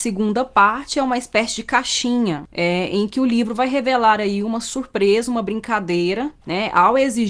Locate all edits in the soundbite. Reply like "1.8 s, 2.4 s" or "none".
none